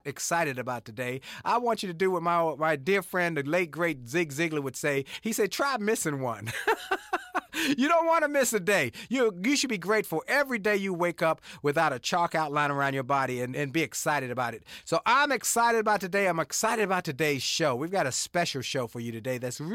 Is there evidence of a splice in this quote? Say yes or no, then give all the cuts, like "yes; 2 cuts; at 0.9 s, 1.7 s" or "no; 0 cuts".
yes; 1 cut; at 13.5 s